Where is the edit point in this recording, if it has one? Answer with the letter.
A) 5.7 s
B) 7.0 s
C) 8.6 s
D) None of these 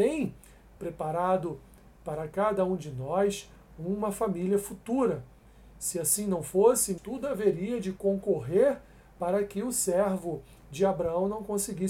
B